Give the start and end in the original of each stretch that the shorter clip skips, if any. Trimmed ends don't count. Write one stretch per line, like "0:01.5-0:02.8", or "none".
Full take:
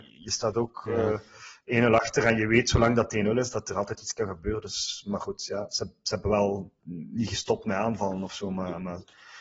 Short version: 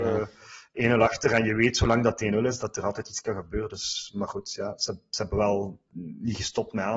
none